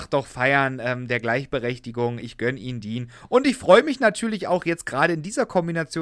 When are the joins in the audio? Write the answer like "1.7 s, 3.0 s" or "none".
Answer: none

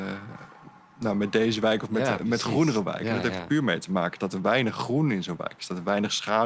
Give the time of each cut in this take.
none

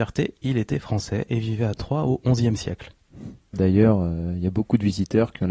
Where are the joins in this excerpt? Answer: 3.5 s

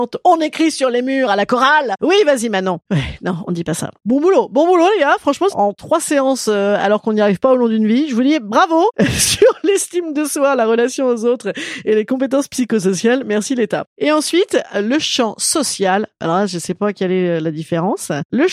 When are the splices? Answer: 4.0 s, 5.5 s

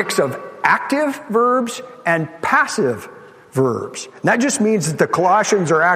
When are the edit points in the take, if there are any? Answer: none

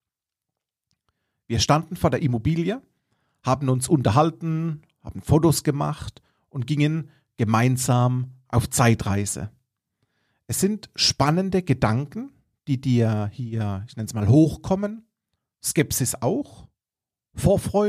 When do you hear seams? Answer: none

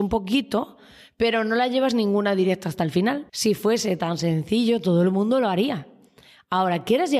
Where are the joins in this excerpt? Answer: 3.3 s

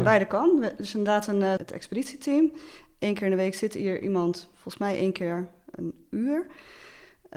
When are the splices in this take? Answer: 1.6 s

